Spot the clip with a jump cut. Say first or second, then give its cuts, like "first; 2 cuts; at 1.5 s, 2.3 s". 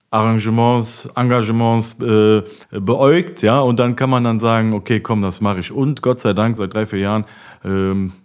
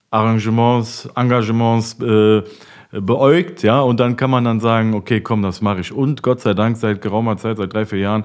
first; 2 cuts; at 2.6 s, 6.6 s